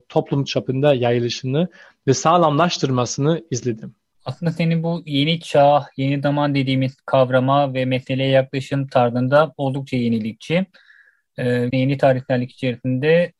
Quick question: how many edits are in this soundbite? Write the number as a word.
one